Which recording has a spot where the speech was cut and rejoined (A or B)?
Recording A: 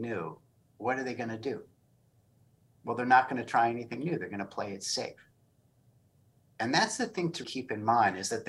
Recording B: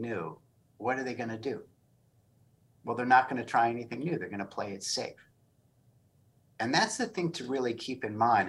A